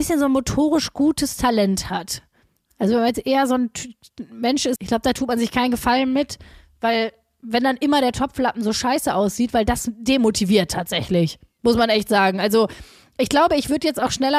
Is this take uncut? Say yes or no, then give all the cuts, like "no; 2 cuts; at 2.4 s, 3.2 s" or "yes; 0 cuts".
no; 1 cut; at 4.8 s